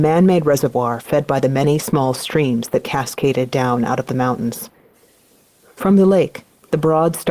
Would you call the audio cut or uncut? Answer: uncut